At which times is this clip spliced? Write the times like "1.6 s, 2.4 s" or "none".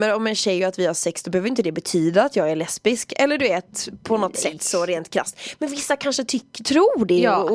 4.0 s